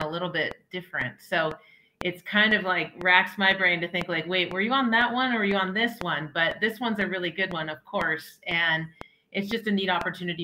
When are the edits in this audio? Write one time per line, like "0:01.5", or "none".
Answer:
none